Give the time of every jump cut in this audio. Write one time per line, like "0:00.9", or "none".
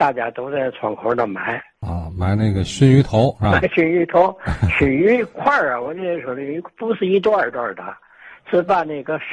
none